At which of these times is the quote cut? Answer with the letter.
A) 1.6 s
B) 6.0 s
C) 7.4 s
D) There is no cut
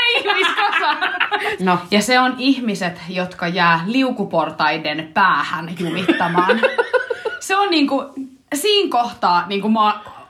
A